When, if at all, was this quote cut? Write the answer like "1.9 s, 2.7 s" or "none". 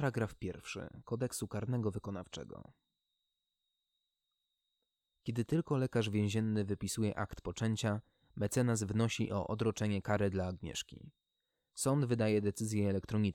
none